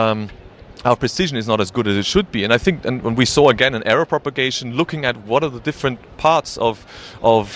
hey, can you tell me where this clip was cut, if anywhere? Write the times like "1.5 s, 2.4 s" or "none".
none